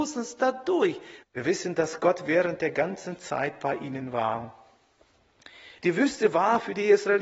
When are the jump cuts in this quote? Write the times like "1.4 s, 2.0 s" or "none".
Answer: 1.2 s, 5.8 s